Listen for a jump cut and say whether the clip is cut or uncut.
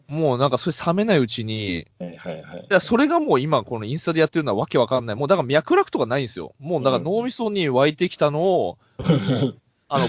uncut